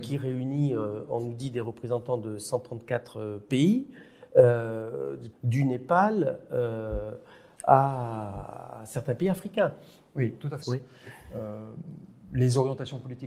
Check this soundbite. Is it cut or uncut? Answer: cut